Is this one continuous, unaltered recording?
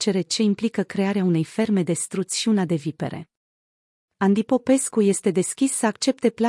yes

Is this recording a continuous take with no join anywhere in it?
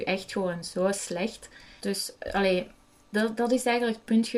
no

